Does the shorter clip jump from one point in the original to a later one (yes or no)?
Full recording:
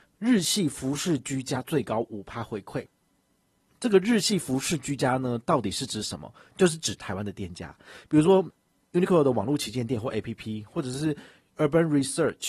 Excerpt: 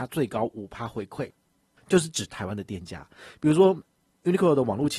yes